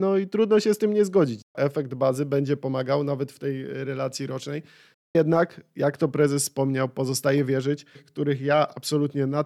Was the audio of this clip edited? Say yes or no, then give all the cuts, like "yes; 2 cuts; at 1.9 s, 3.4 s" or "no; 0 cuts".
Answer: yes; 2 cuts; at 4.9 s, 8.0 s